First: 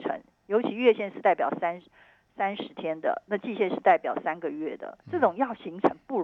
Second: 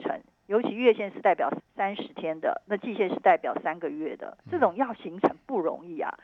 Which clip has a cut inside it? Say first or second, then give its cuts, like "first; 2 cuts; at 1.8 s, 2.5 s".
second; 1 cut; at 1.6 s